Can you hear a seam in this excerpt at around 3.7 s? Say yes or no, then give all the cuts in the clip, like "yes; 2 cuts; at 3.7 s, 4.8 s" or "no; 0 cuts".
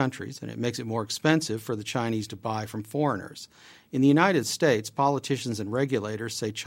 no; 0 cuts